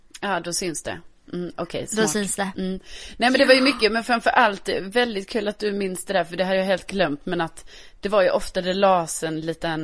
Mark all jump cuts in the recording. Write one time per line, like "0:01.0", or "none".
none